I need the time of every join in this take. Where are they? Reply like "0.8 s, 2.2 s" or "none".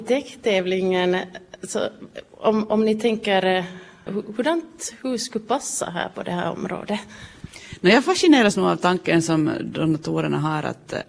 4.1 s